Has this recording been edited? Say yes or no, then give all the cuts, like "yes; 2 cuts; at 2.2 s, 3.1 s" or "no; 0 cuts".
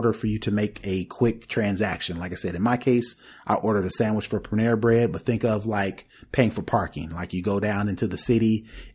no; 0 cuts